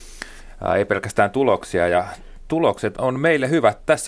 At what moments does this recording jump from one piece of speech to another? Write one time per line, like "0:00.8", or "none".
0:02.9